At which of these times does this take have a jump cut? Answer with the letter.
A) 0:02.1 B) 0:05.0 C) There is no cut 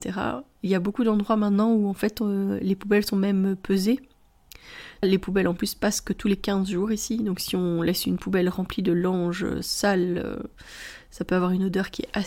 B